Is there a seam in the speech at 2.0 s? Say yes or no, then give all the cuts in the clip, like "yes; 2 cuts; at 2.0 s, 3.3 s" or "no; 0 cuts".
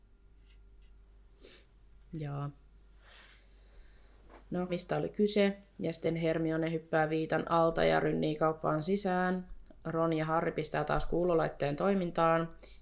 no; 1 cut; at 4.7 s